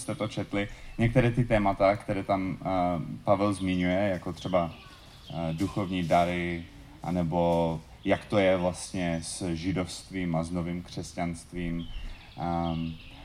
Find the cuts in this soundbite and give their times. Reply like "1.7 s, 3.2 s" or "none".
none